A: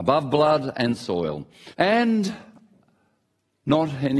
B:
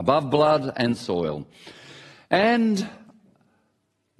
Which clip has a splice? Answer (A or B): A